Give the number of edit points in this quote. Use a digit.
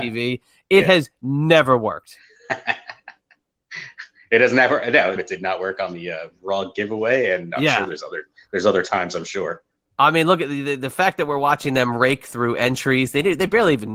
1